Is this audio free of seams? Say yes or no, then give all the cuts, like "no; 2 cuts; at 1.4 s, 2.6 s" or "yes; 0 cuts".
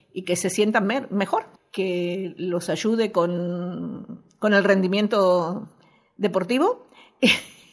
no; 1 cut; at 1.6 s